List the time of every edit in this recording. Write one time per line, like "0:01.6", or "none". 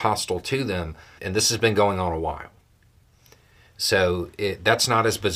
0:01.2